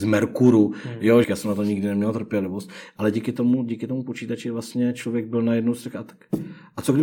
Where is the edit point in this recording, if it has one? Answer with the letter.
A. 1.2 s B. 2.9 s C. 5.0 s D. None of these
A